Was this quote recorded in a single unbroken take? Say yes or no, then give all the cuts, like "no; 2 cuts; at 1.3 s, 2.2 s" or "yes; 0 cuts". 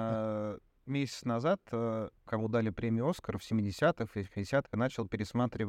no; 2 cuts; at 2.3 s, 4.7 s